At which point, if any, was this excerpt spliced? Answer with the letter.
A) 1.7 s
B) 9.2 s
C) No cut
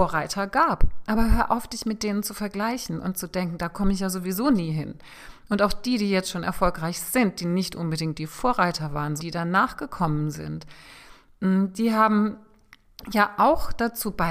B